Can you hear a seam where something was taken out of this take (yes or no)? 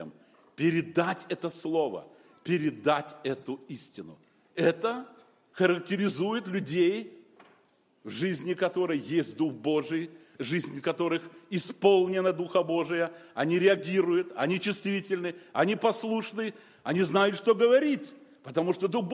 no